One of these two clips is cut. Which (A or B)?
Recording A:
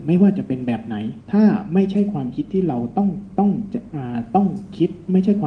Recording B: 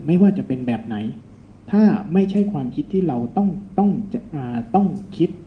A